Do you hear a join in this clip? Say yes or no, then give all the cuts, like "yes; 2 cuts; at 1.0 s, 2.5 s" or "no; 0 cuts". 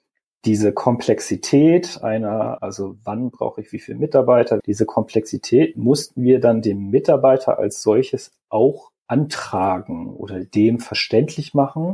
yes; 3 cuts; at 2.6 s, 4.6 s, 9.0 s